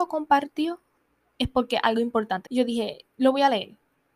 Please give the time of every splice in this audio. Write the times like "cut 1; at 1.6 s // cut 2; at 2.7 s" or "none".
cut 1; at 2.5 s

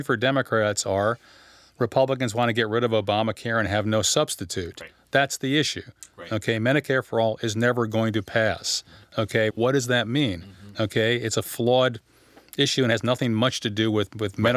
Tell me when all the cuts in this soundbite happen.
cut 1; at 9.5 s

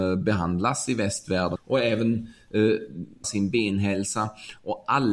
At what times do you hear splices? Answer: cut 1; at 1.6 s // cut 2; at 3.2 s

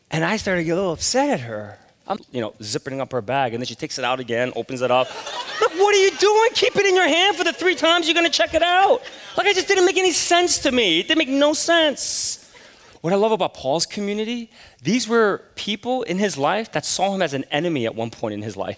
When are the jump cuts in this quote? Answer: cut 1; at 2.2 s // cut 2; at 13.0 s

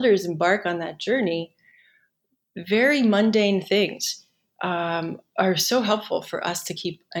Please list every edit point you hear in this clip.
none

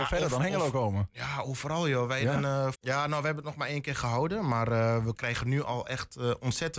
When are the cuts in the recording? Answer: cut 1; at 2.7 s

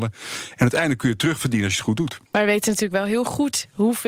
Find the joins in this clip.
cut 1; at 2.3 s

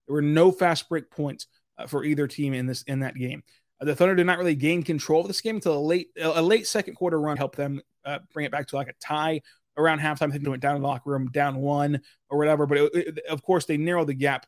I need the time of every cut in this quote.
cut 1; at 7.4 s // cut 2; at 10.4 s

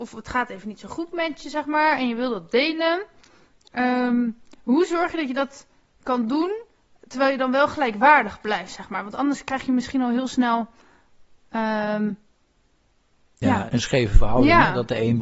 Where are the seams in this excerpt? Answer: cut 1; at 13.7 s

